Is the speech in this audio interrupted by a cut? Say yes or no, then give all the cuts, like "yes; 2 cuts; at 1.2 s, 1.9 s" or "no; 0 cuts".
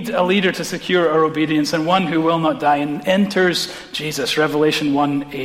no; 0 cuts